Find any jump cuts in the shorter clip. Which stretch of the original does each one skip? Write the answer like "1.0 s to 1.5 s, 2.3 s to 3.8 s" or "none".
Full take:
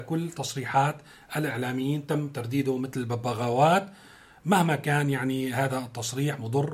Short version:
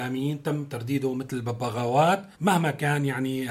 4.0 s to 4.4 s